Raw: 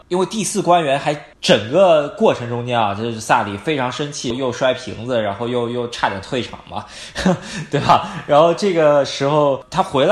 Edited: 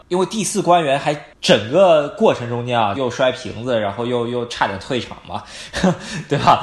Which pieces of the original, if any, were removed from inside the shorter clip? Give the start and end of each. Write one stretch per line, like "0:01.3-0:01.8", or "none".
0:02.9-0:04.4